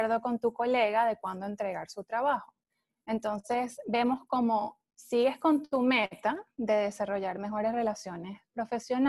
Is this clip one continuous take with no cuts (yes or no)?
yes